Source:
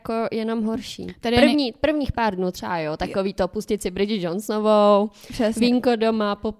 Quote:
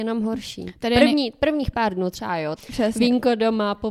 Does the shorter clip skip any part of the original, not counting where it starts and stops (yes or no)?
yes